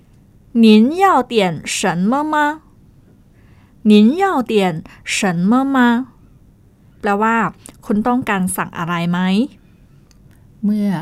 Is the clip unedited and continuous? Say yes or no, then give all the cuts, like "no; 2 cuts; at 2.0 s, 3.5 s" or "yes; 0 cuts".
no; 1 cut; at 6.9 s